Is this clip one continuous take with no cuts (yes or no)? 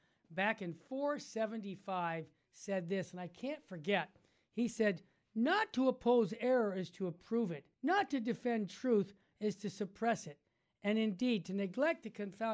no